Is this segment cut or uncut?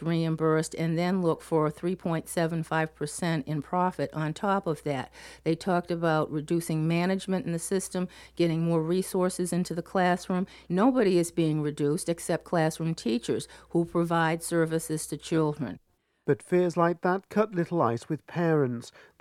uncut